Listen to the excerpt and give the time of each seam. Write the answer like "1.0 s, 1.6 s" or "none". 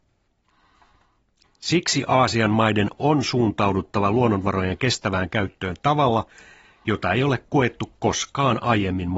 1.4 s